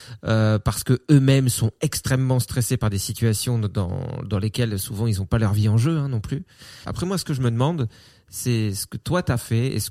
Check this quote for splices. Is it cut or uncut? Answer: cut